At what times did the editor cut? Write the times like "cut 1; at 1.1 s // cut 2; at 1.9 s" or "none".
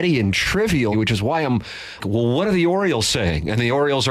cut 1; at 0.9 s // cut 2; at 2.0 s